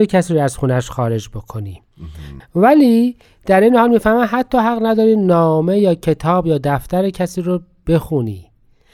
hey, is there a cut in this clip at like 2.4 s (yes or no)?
yes